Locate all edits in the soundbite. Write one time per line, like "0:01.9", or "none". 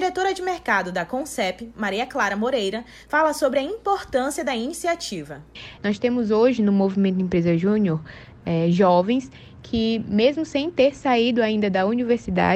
0:05.8